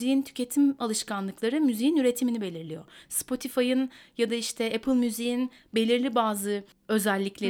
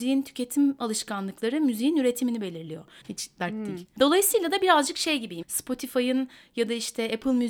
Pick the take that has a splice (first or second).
second